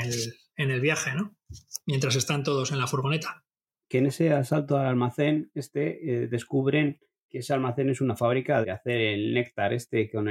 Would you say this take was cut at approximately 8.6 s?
yes; 2 cuts; at 7.3 s, 8.6 s

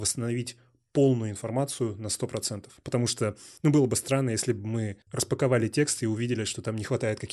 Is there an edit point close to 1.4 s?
no; 2 cuts; at 2.8 s, 5.0 s

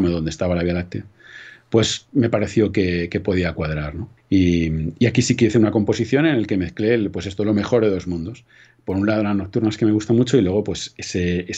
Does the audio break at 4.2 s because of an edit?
yes; 1 cut; at 4.2 s

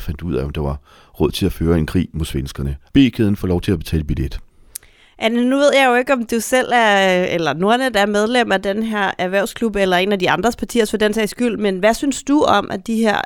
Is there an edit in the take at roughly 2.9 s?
yes; 1 cut; at 2.9 s

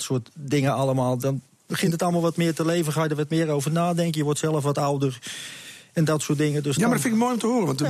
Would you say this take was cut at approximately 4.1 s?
no; 0 cuts

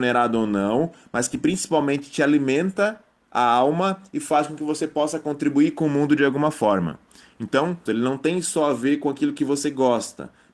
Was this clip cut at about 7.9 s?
yes; 1 cut; at 7.9 s

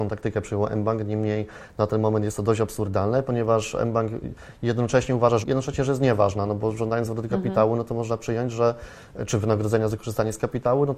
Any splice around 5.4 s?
yes; 1 cut; at 5.4 s

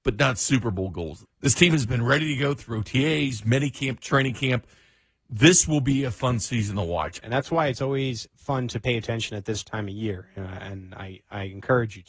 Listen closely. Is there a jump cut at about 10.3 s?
no; 2 cuts; at 1.2 s, 7.2 s

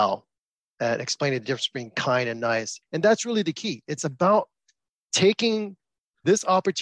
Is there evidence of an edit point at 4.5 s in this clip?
no; 1 cut; at 2.8 s

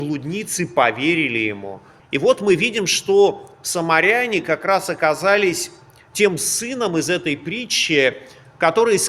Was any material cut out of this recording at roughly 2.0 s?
yes; 1 cut; at 2.0 s

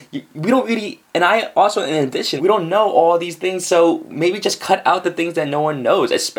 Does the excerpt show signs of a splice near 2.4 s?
yes; 1 cut; at 2.4 s

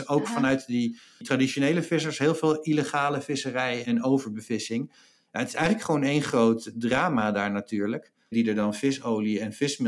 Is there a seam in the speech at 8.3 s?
yes; 2 cuts; at 3.8 s, 8.3 s

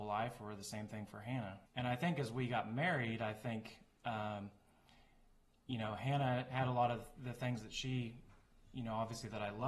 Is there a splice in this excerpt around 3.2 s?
no; 1 cut; at 1.7 s

